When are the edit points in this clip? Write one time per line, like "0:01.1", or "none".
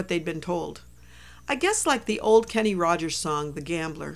none